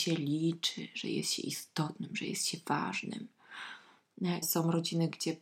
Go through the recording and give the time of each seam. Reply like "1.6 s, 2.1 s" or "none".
4.4 s